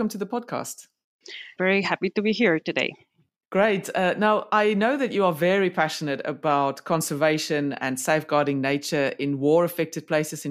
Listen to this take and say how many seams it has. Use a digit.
1